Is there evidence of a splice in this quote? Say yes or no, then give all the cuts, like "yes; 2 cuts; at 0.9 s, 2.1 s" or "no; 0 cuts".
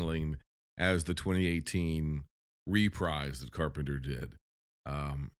no; 0 cuts